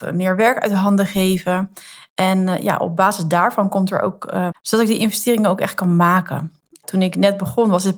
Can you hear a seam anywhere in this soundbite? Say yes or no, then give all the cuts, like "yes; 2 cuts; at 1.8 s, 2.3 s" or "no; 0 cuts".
yes; 1 cut; at 4.5 s